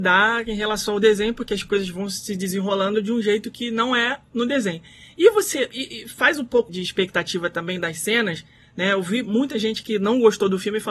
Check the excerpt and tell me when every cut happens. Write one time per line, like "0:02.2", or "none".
0:06.7